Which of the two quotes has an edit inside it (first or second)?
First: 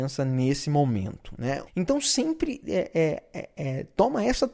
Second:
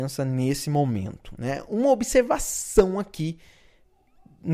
first